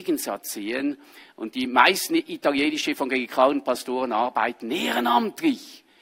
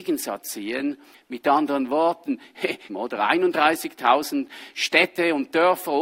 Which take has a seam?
second; 2 cuts; at 1.1 s, 2.9 s

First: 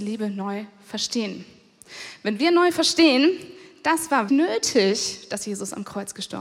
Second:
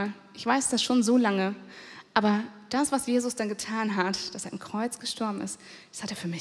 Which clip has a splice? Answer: first; 1 cut; at 4.3 s

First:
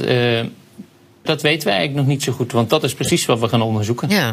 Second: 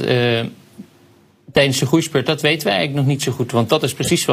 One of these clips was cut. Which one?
first; 1 cut; at 1.3 s

